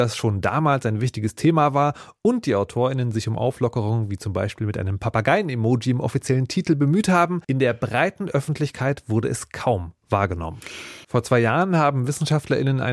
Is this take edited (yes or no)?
yes